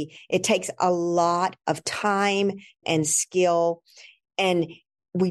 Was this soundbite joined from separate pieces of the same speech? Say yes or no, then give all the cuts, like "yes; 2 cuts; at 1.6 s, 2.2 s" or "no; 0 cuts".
yes; 1 cut; at 2.8 s